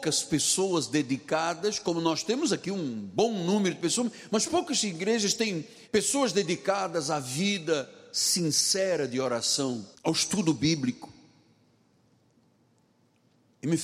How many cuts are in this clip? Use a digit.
2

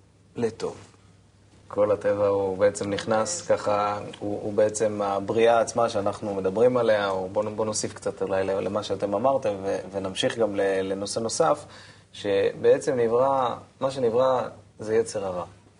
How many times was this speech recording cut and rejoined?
1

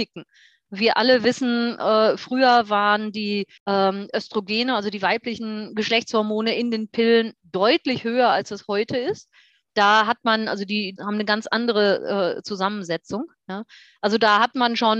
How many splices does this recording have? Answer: 3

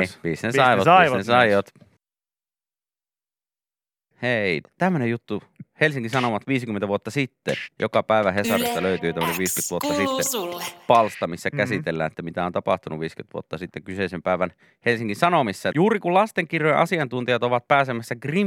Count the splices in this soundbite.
2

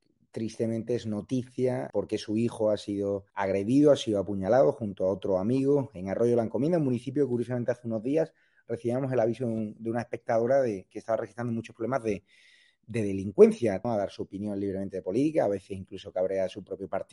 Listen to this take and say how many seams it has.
3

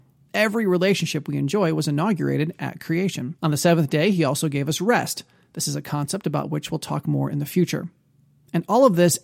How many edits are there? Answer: 1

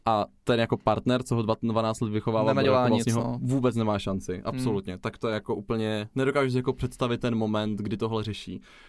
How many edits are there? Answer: 0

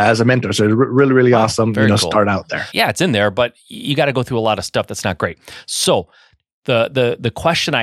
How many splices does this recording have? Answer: 1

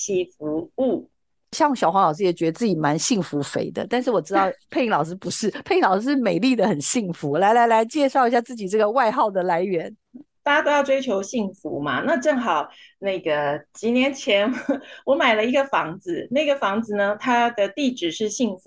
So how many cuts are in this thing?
0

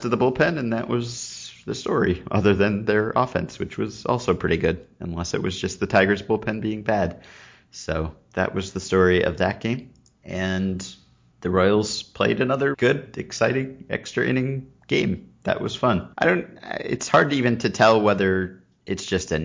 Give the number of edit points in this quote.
2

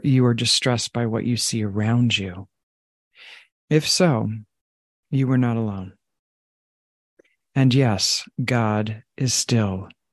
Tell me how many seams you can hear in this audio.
2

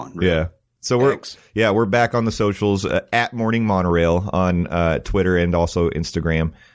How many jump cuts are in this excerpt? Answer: 0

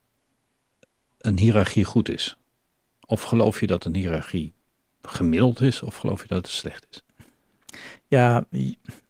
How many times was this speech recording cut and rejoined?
0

